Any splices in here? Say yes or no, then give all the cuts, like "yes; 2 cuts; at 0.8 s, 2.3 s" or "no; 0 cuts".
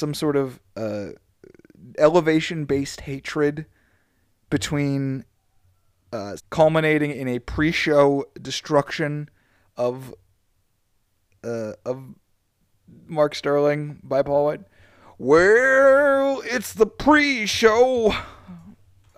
yes; 1 cut; at 6.4 s